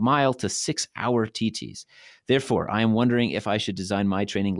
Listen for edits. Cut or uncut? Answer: uncut